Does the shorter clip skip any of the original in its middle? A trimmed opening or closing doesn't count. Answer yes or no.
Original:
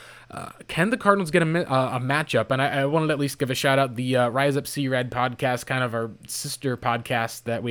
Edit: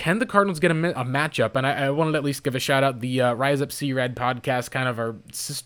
yes